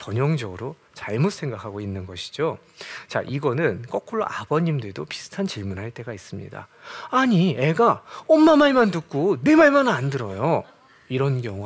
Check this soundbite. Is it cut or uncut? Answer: uncut